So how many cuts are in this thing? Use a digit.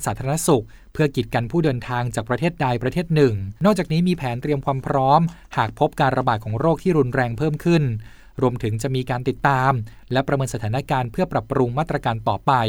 1